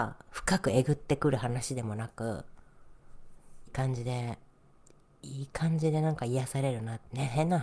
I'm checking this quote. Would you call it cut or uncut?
cut